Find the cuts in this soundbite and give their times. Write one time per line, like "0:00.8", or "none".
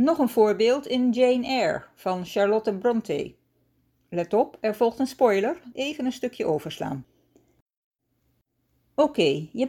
0:05.7

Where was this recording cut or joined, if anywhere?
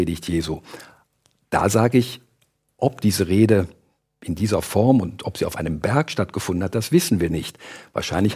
none

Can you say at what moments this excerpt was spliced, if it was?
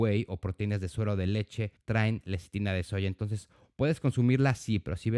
0:03.6

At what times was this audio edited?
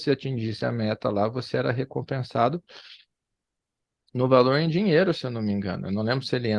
none

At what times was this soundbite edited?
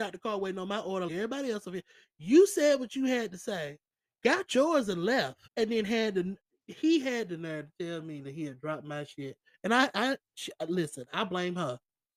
0:01.1
0:05.5

